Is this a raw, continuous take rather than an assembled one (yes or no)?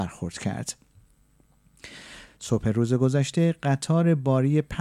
no